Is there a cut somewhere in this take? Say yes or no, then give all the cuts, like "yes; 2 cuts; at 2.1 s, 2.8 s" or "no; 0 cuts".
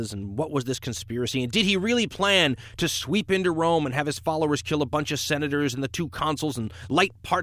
no; 0 cuts